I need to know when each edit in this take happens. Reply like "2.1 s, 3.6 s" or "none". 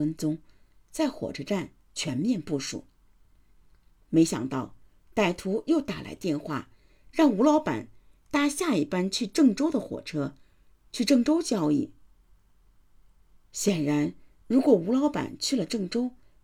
none